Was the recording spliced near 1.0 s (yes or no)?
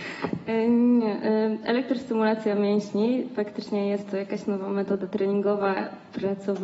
no